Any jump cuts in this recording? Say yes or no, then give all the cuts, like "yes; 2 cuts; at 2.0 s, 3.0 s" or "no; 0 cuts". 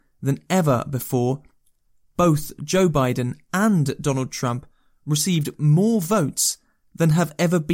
no; 0 cuts